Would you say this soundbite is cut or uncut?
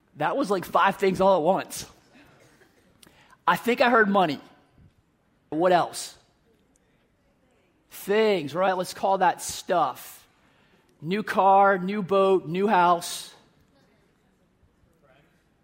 cut